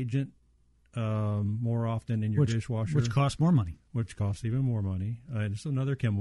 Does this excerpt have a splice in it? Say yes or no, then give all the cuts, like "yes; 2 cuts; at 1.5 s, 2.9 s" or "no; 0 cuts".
no; 0 cuts